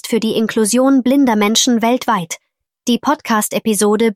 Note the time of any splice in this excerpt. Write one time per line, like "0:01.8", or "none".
0:02.7